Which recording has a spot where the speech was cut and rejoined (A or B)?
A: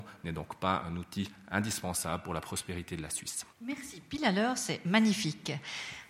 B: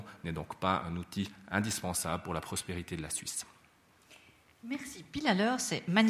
A